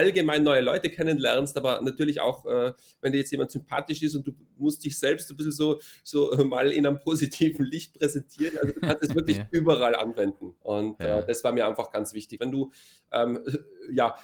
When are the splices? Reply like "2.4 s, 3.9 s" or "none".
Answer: 10.6 s, 12.4 s